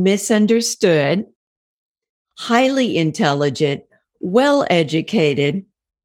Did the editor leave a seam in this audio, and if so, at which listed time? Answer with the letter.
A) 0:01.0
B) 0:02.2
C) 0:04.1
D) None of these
D